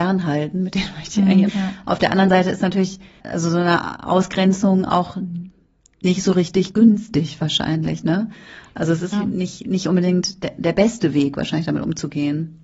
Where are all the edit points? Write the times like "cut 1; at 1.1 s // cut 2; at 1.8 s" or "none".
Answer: cut 1; at 1.5 s // cut 2; at 9.1 s